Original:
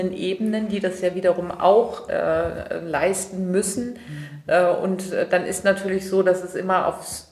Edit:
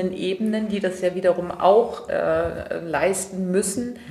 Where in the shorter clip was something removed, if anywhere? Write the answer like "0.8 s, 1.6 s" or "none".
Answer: none